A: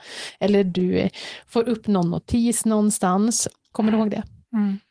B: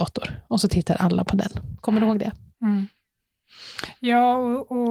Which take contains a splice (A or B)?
A